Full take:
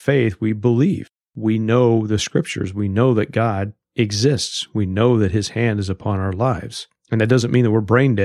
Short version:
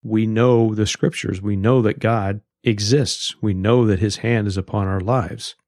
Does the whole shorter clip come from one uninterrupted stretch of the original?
yes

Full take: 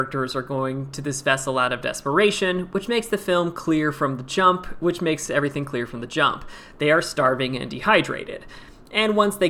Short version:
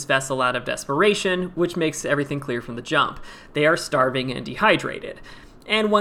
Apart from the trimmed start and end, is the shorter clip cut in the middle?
yes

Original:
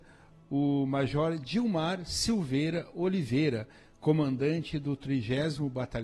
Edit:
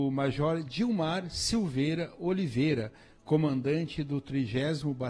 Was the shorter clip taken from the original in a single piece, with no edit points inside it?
yes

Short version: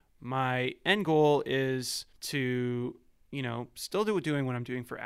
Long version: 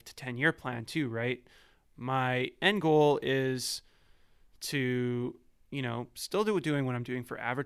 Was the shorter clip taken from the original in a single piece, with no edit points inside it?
no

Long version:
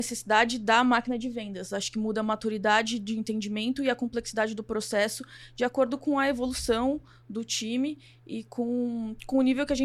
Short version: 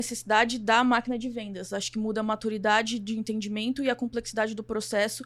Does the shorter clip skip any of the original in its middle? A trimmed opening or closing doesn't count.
no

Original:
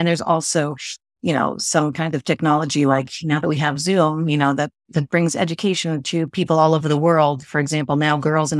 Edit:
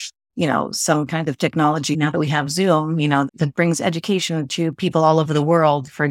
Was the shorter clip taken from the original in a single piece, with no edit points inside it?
no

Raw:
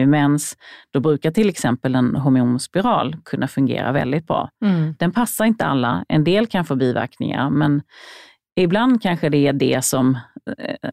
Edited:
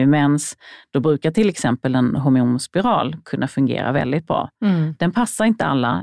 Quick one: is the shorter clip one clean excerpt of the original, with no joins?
yes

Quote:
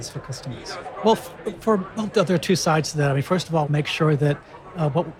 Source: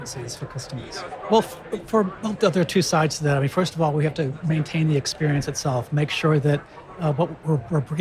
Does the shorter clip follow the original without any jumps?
no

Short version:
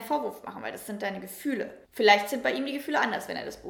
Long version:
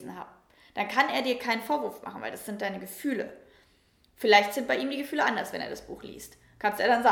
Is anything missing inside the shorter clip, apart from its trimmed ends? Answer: yes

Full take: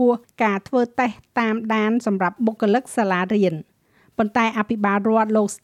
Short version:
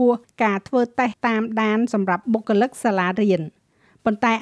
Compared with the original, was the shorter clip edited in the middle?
yes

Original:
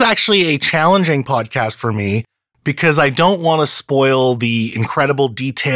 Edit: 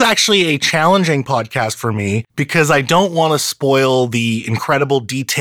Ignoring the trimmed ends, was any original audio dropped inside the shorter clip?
yes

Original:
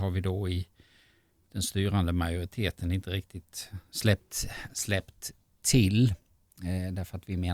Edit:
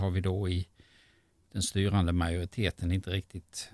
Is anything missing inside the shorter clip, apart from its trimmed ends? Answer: no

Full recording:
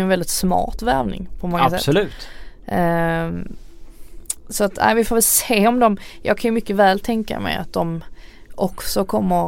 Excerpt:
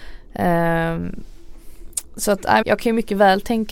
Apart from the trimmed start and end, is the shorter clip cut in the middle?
yes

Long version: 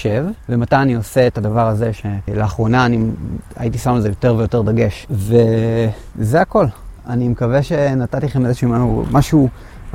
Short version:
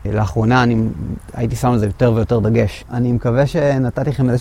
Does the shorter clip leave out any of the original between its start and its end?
yes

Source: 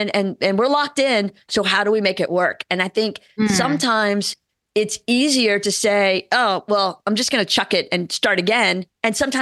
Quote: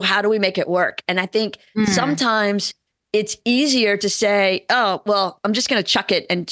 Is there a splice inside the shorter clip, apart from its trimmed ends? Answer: no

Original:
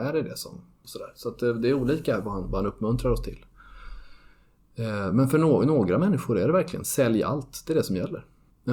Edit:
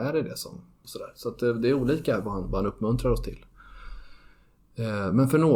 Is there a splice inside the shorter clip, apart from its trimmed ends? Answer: no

